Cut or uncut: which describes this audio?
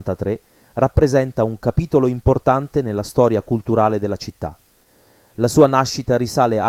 uncut